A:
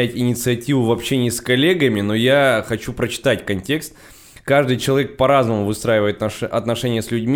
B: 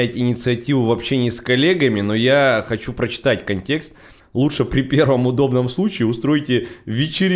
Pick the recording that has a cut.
B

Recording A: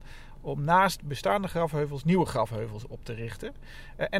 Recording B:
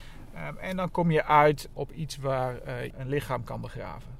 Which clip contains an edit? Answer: B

